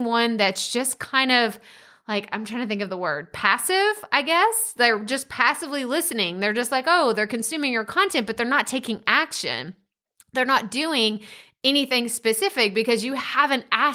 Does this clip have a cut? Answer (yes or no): no